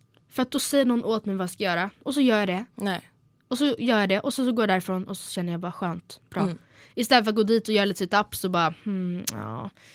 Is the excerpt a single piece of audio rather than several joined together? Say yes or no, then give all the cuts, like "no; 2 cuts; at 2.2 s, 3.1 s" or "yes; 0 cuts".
no; 1 cut; at 2.7 s